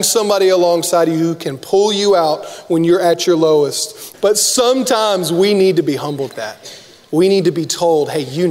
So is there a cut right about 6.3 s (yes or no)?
yes